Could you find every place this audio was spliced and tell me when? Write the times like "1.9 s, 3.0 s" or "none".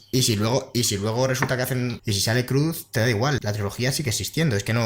2.0 s, 3.4 s